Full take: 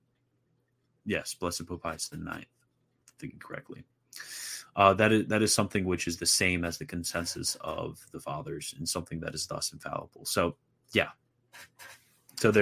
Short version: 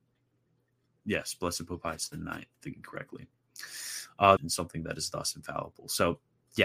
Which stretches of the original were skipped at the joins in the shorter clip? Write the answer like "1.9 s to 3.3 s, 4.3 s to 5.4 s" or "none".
2.5 s to 3.1 s, 4.9 s to 8.7 s